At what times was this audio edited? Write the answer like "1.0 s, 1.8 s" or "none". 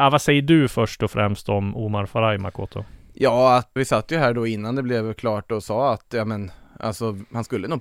3.8 s